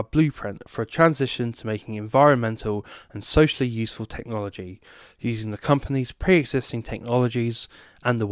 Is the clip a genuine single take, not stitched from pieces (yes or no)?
yes